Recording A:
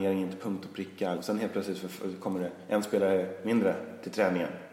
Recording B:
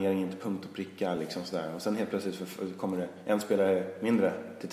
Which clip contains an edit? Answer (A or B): A